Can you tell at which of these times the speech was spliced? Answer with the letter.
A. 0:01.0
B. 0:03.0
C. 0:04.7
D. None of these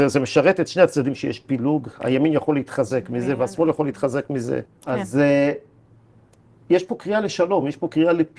C